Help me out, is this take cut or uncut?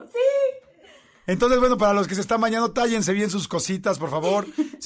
uncut